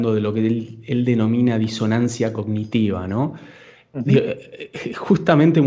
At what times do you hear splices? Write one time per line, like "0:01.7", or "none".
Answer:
none

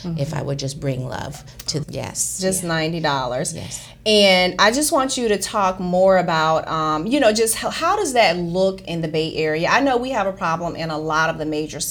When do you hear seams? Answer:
0:01.8

